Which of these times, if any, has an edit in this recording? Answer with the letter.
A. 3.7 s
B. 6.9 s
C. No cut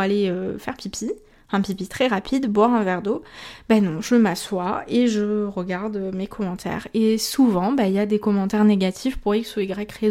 C